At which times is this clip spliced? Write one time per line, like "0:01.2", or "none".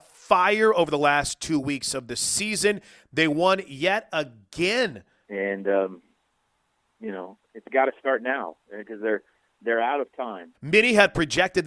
0:05.2
0:10.5